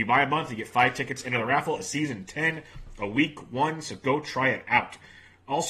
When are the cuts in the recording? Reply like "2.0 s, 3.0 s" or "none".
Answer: none